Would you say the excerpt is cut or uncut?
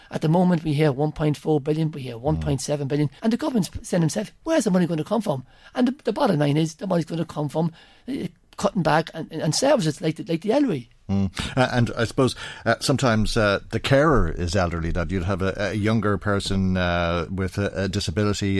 cut